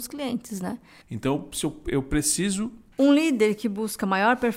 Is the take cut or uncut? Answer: cut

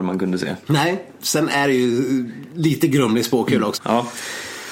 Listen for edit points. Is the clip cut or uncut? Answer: cut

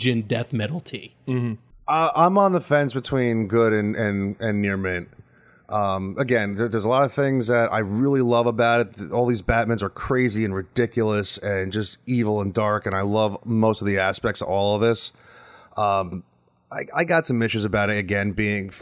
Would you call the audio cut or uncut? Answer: uncut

